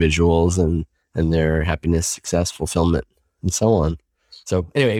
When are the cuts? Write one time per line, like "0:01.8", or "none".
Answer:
none